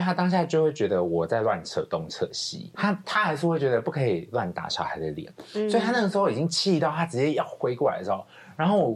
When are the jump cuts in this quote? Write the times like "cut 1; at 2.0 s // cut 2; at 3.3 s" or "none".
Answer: cut 1; at 2.7 s

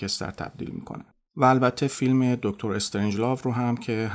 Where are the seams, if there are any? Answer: none

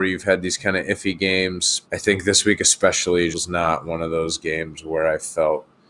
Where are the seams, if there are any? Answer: cut 1; at 1.8 s // cut 2; at 3.3 s

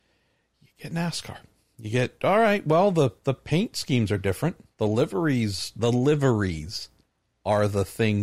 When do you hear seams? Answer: none

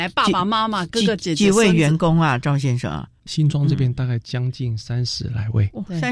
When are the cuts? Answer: none

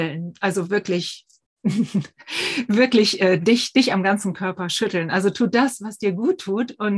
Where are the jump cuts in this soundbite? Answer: none

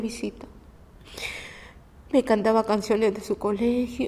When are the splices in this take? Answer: none

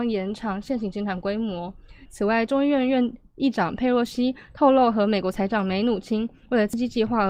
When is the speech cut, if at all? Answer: cut 1; at 2.1 s

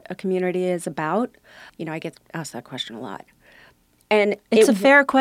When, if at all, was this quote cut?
cut 1; at 1.7 s

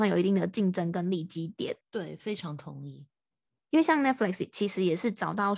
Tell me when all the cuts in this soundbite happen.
cut 1; at 1.8 s

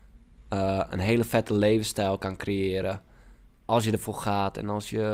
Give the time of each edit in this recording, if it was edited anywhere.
none

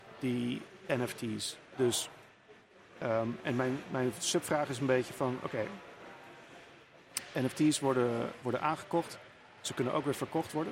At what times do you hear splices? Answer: cut 1; at 8.4 s

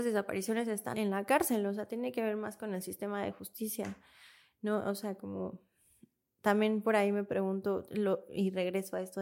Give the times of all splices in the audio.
cut 1; at 0.9 s

